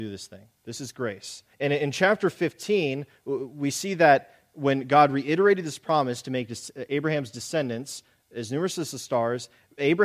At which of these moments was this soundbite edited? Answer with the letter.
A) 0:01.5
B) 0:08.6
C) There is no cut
A